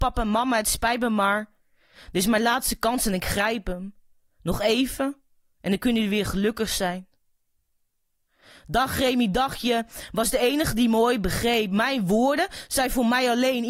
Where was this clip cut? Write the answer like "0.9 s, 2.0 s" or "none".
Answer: none